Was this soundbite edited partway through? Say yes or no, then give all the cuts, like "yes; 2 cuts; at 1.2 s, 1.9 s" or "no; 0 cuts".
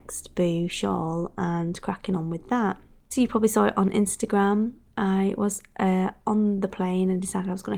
yes; 1 cut; at 3.1 s